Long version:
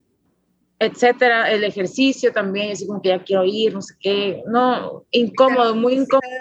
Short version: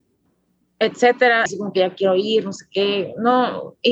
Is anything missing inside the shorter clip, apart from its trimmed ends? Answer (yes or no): yes